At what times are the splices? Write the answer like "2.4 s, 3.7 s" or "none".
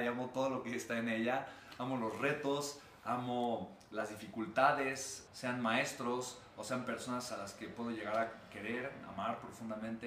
5.3 s